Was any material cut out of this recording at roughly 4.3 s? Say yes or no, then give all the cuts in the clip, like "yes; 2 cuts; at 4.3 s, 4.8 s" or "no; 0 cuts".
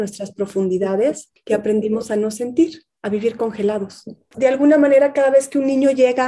yes; 1 cut; at 4.3 s